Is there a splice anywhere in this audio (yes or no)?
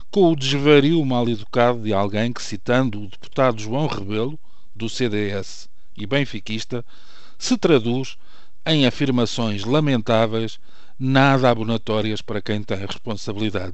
no